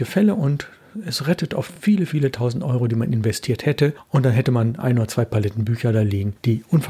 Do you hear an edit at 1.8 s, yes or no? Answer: no